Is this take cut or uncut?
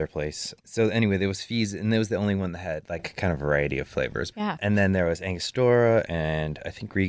cut